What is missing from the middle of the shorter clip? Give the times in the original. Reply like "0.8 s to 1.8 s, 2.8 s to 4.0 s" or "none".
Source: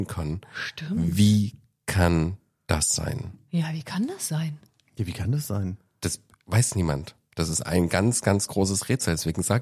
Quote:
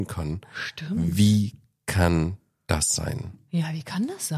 none